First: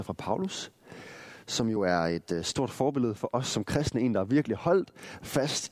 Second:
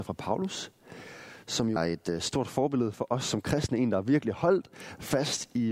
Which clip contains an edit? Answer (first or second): second